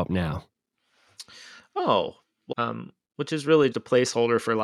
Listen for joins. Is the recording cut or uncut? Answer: cut